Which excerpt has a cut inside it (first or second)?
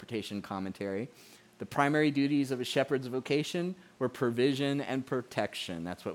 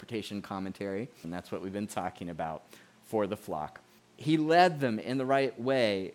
second